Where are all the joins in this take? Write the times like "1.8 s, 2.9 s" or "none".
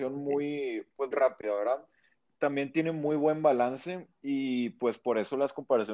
1.1 s